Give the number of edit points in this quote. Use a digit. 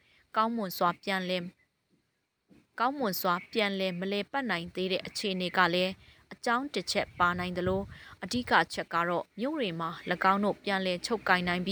1